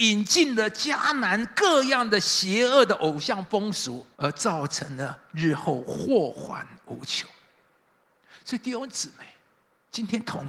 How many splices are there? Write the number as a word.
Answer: one